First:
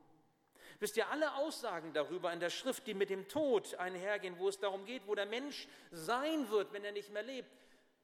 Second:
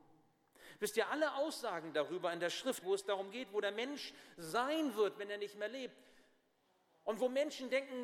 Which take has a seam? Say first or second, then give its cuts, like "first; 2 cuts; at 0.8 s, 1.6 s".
second; 1 cut; at 2.8 s